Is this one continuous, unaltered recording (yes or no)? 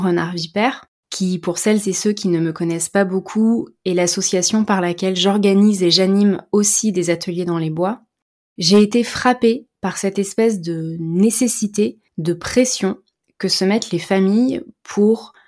yes